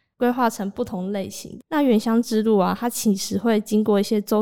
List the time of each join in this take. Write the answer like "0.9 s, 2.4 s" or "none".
1.6 s